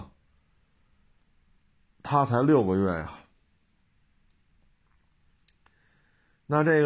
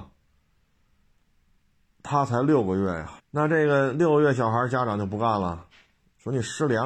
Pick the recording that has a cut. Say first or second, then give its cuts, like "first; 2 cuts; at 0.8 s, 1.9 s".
second; 1 cut; at 3.2 s